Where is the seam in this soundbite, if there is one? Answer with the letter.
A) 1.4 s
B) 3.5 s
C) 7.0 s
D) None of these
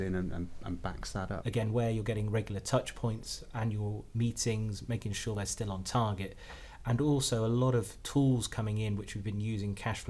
A